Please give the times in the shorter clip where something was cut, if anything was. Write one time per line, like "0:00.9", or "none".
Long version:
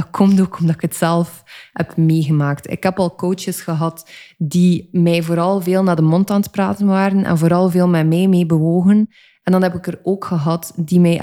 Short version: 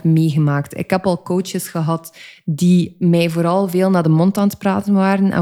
none